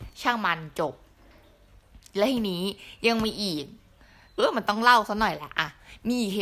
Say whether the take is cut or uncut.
cut